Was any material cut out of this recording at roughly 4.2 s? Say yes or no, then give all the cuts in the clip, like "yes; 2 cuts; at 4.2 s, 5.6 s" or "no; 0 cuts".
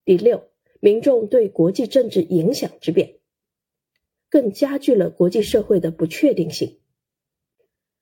yes; 1 cut; at 4.2 s